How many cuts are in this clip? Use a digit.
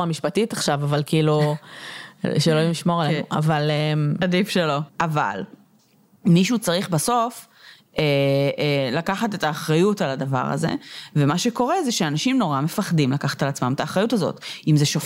1